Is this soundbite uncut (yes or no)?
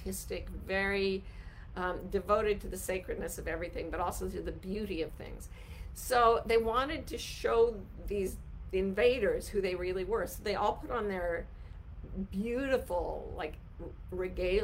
yes